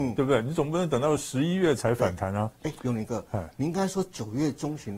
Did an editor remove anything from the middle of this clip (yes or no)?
no